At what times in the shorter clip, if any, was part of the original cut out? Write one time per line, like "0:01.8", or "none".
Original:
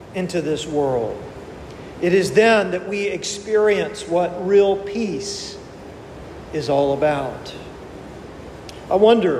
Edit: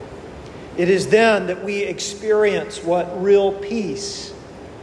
none